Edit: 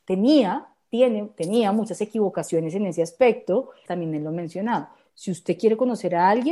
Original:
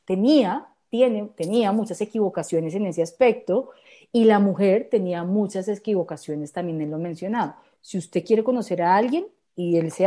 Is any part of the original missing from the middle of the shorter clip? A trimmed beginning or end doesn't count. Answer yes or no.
yes